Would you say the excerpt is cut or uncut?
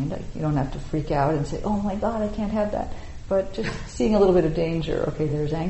uncut